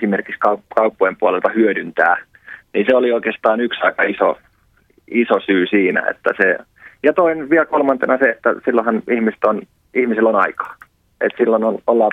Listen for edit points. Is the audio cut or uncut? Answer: uncut